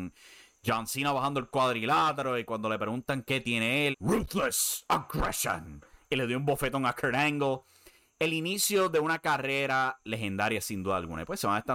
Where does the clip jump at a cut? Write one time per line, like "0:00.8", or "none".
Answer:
0:03.9